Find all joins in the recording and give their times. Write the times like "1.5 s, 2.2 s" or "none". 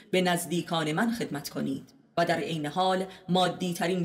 2.1 s